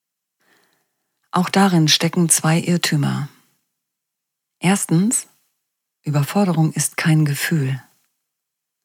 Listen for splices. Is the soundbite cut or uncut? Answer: uncut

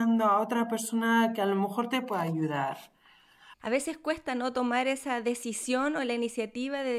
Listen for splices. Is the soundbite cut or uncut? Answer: cut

